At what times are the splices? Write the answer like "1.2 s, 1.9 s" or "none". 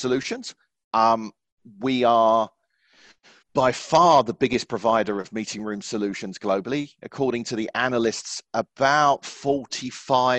none